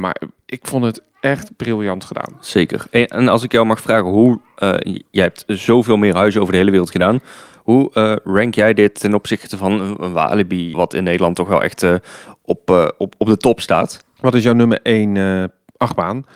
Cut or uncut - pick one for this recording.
cut